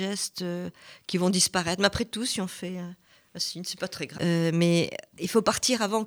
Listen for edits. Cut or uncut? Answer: cut